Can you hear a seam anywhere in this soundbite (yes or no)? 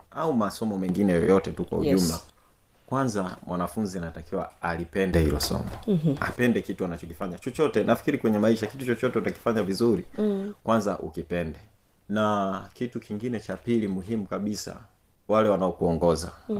no